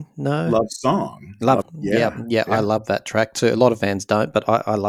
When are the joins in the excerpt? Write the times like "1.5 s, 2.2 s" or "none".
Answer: 1.6 s